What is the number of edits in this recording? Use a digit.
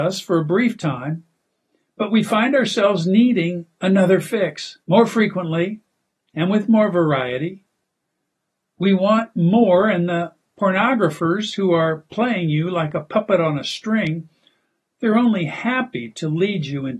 1